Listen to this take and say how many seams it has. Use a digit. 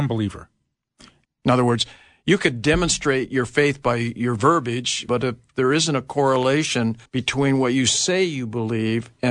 3